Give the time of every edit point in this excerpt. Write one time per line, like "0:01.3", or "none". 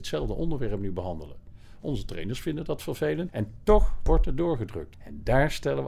0:03.3
0:04.9